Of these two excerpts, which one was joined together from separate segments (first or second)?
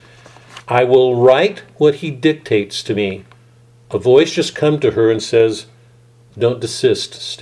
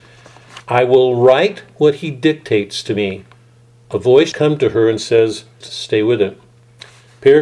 second